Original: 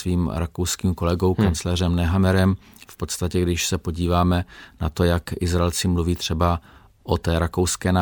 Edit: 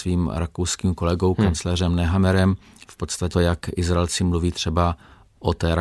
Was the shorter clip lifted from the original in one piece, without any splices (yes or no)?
no